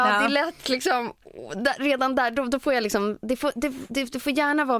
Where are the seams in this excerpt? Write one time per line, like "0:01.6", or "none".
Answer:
none